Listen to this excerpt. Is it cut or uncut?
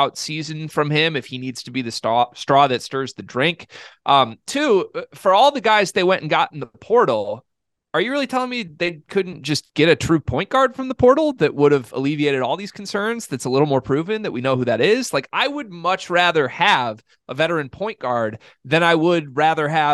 uncut